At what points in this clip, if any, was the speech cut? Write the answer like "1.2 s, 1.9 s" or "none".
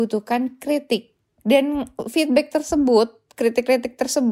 none